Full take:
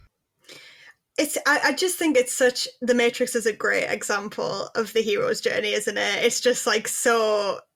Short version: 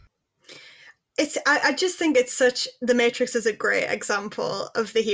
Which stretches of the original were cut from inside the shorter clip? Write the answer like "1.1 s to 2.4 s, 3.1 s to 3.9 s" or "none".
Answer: none